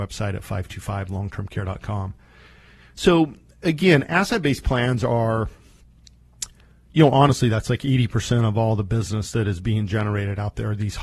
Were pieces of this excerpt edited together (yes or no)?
no